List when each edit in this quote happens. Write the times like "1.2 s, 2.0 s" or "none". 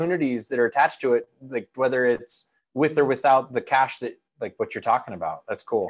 1.7 s